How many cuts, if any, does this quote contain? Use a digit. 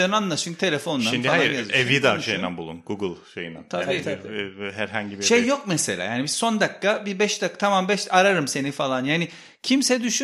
0